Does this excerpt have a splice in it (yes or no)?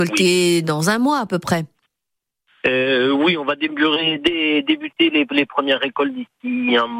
no